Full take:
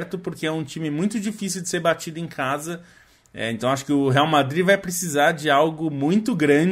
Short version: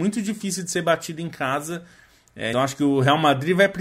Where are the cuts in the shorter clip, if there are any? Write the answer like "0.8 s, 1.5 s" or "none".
2.5 s